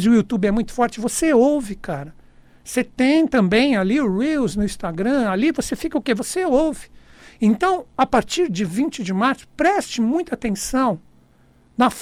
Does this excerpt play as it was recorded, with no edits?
yes; 0 cuts

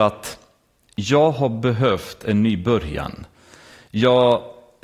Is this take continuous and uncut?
yes; 0 cuts

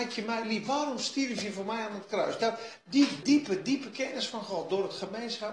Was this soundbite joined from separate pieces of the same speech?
yes; 1 cut; at 3.2 s

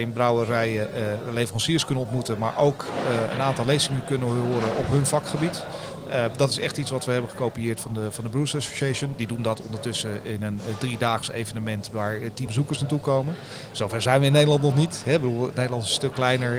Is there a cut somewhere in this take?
yes; 1 cut; at 12.5 s

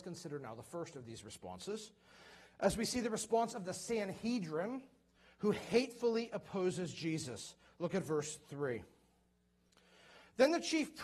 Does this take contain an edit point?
no; 0 cuts

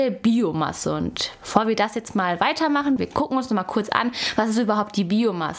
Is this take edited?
yes; 1 cut; at 3.0 s

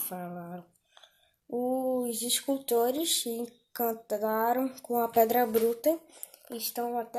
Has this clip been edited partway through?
no; 0 cuts

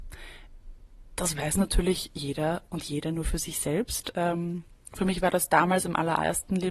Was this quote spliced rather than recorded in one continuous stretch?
no; 0 cuts

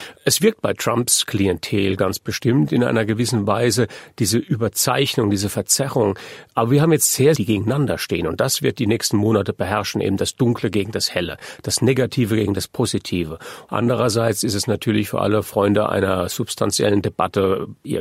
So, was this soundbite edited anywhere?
yes; 2 cuts; at 7.3 s, 13.7 s

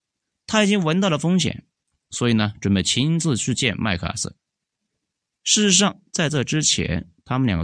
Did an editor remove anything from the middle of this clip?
no; 0 cuts

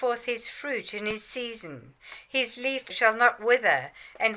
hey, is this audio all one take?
no; 1 cut; at 2.9 s

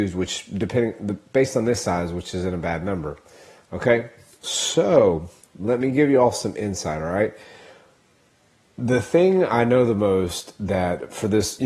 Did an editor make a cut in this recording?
no; 0 cuts

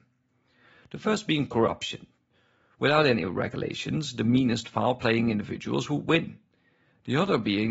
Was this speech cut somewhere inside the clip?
no; 0 cuts

